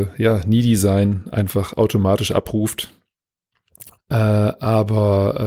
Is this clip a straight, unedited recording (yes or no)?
no